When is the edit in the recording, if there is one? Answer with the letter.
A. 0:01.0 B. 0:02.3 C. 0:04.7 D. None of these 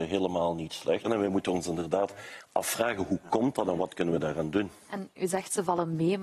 A